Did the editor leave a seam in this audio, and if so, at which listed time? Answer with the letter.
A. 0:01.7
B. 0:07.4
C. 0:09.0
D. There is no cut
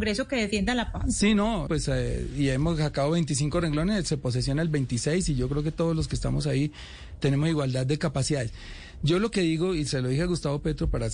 A